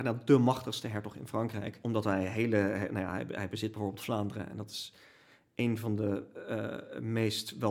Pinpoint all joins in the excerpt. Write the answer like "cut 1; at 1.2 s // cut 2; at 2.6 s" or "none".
cut 1; at 1.8 s

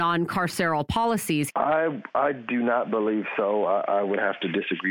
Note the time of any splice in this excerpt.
cut 1; at 1.5 s

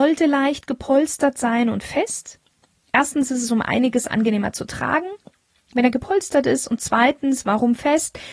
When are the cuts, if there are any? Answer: none

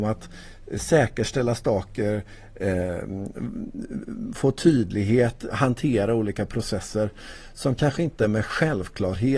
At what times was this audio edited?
cut 1; at 5.5 s

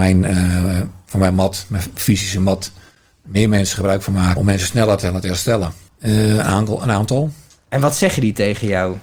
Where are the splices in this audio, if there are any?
cut 1; at 4.4 s // cut 2; at 5.9 s

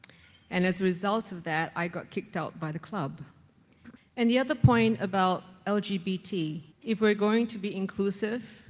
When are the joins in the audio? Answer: cut 1; at 4.0 s // cut 2; at 6.7 s

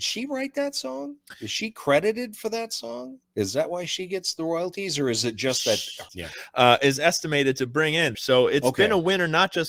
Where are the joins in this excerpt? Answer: cut 1; at 6.1 s // cut 2; at 8.1 s

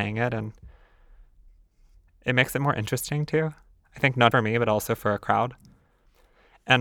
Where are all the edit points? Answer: cut 1; at 4.3 s

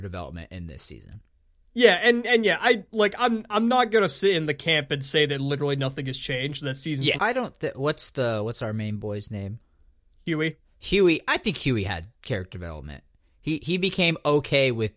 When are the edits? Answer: cut 1; at 7.2 s // cut 2; at 12.1 s

